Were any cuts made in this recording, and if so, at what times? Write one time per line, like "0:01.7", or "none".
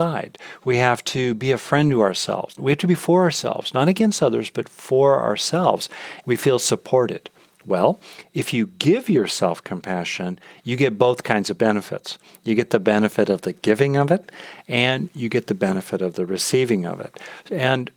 0:06.2